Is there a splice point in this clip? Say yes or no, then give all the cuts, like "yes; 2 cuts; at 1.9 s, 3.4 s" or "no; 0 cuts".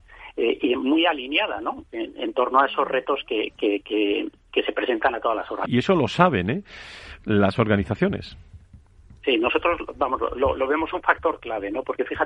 yes; 1 cut; at 5.7 s